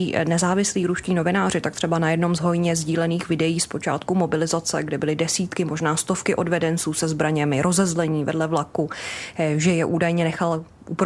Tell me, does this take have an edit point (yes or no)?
no